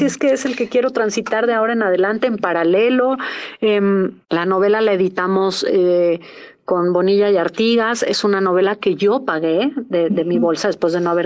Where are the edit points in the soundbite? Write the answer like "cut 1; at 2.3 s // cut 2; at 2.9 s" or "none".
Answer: cut 1; at 4.2 s

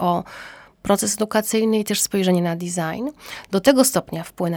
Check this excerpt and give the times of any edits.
cut 1; at 3.5 s

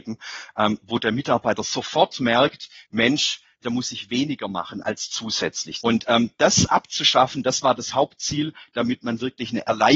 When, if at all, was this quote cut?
cut 1; at 3.6 s // cut 2; at 5.8 s

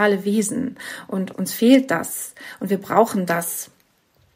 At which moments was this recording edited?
cut 1; at 1.3 s

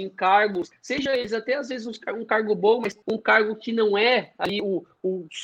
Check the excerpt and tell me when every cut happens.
cut 1; at 3.0 s

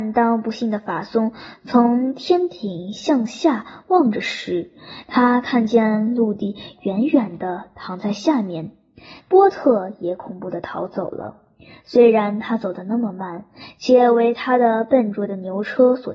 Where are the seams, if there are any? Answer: cut 1; at 9.2 s

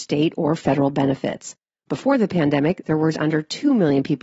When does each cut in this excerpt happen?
cut 1; at 3.1 s

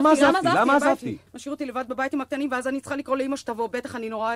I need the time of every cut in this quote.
cut 1; at 1.3 s

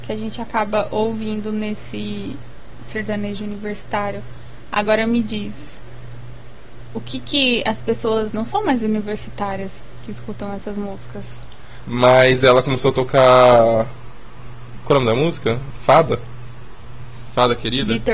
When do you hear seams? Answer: cut 1; at 8.3 s // cut 2; at 11.8 s

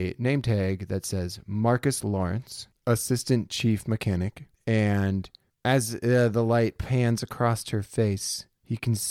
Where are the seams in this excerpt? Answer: none

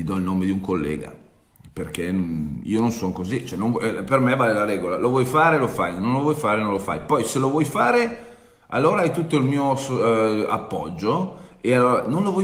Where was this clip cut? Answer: none

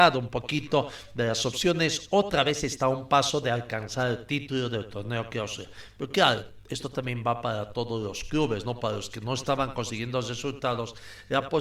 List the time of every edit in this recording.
none

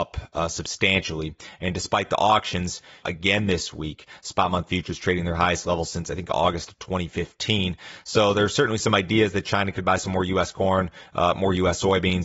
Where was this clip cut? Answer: cut 1; at 3.0 s

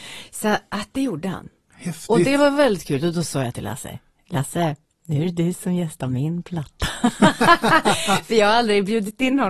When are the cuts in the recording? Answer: none

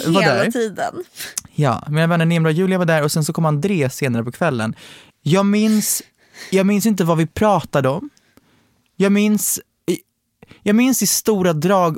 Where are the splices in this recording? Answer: cut 1; at 5.1 s

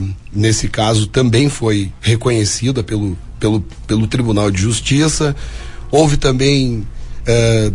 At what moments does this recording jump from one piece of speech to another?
none

